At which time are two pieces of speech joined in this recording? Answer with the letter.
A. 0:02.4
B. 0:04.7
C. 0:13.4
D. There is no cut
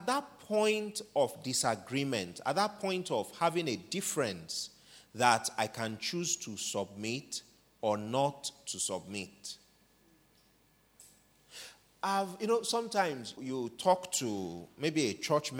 C